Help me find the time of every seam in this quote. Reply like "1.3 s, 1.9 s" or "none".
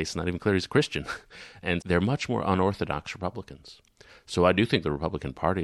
1.8 s